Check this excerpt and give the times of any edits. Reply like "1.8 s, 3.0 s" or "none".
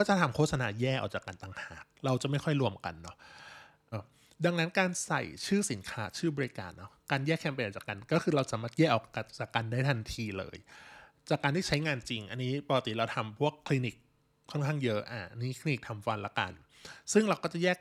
3.9 s